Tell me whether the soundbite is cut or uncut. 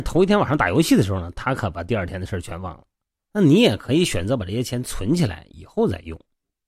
cut